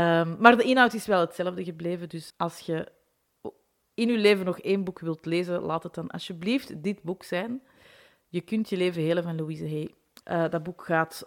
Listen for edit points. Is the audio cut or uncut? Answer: cut